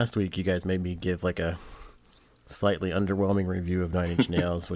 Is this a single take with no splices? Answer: yes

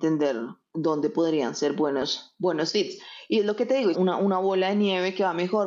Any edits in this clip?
yes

